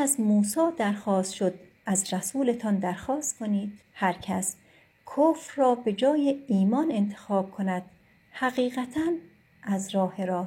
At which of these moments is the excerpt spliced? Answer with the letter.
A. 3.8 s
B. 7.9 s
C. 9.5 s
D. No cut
A